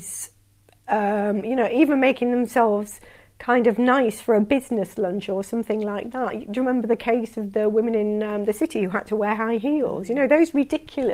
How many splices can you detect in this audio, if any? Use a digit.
0